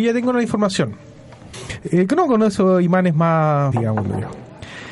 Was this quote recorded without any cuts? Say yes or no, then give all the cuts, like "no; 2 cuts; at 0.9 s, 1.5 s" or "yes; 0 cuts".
no; 2 cuts; at 1.5 s, 3.7 s